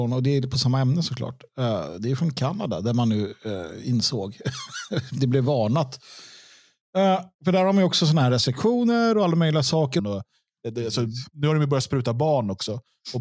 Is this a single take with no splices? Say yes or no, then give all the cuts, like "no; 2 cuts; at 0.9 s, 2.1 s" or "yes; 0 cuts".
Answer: no; 2 cuts; at 7.3 s, 10.0 s